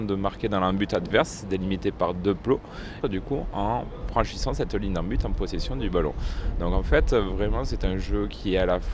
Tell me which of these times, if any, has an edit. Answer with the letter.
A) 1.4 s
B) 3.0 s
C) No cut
B